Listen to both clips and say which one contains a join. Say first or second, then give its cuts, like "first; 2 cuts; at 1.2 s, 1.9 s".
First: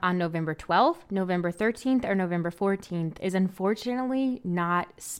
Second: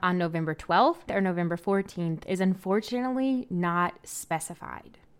second; 1 cut; at 1.1 s